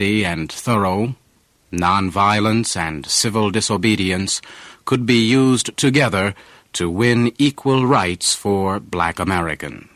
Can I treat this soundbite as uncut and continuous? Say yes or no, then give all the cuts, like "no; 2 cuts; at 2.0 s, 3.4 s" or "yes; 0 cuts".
yes; 0 cuts